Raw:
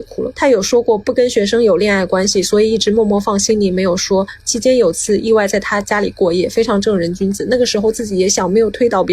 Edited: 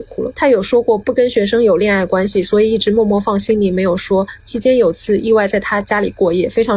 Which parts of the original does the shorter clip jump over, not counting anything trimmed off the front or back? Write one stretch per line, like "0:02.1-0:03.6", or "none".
none